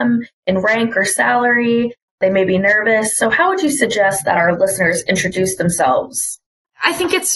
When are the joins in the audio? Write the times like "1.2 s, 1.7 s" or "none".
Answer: none